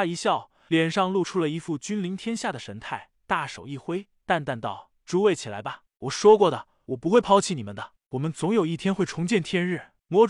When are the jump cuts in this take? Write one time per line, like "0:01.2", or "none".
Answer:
none